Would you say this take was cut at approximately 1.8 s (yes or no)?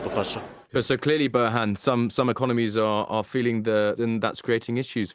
no